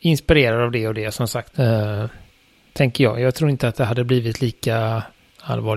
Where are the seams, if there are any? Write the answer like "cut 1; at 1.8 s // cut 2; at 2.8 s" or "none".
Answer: cut 1; at 1.5 s